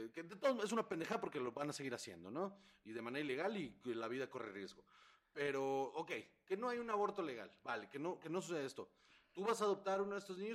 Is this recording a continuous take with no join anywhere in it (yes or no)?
yes